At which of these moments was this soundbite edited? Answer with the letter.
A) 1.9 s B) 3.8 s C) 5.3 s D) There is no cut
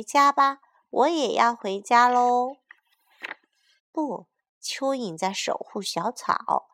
B